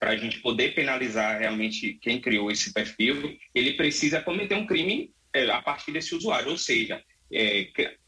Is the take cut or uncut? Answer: uncut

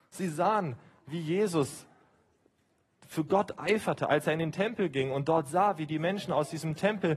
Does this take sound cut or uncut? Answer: uncut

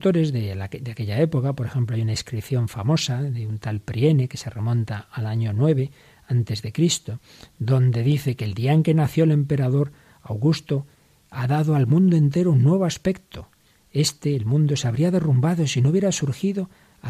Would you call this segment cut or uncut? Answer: uncut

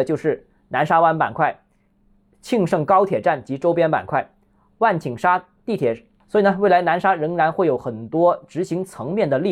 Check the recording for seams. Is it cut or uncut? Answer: cut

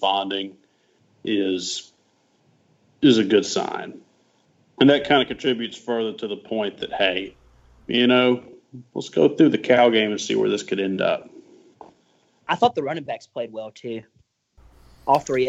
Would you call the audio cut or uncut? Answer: uncut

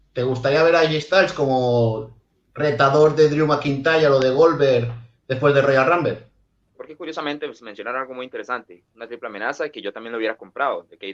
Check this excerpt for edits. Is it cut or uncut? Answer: cut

